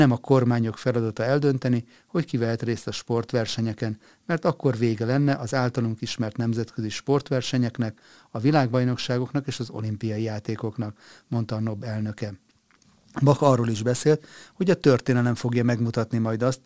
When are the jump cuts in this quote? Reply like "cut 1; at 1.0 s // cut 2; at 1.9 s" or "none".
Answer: none